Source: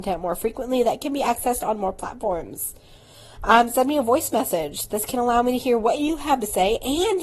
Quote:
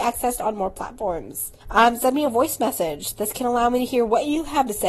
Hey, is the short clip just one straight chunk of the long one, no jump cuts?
no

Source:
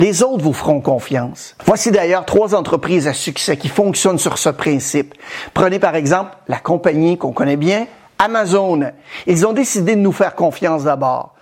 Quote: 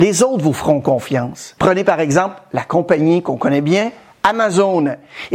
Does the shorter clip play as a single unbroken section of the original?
no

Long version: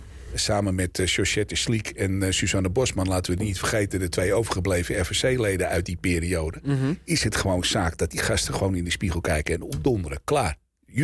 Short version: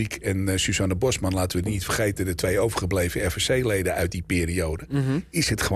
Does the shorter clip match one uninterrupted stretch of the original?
yes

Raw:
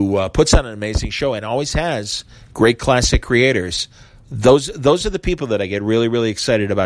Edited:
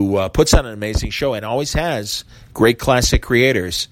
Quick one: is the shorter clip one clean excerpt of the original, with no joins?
yes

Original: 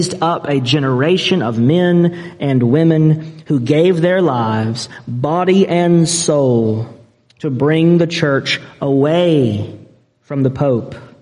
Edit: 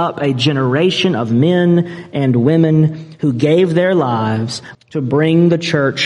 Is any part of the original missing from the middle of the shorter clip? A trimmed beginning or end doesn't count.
yes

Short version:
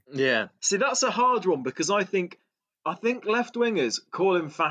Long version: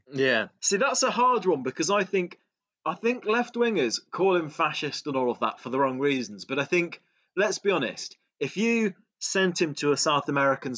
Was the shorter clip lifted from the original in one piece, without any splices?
yes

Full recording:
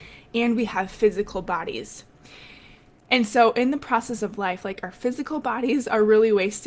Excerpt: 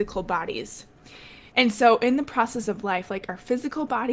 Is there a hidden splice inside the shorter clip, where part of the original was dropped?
yes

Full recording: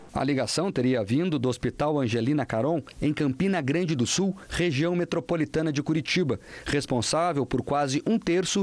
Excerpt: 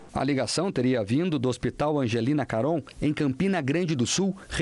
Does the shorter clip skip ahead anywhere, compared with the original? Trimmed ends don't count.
no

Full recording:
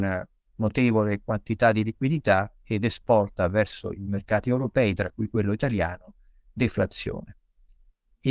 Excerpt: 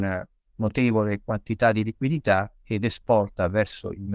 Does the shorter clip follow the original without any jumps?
yes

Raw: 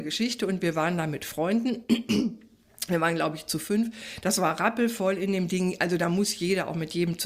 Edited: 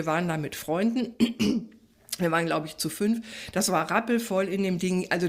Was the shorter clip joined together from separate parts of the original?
no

